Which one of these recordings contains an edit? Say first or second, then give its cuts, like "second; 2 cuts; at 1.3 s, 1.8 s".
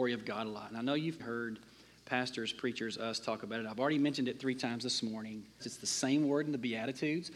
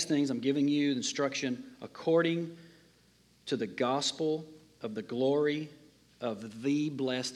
first; 2 cuts; at 1.2 s, 5.6 s